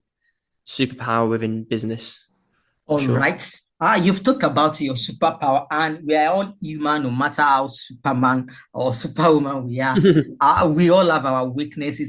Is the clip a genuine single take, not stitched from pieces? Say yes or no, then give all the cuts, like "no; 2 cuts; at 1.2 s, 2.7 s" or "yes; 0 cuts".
yes; 0 cuts